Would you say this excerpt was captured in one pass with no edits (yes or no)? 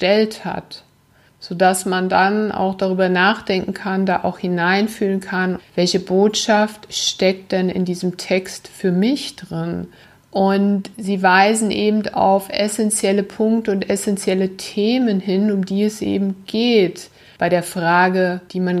no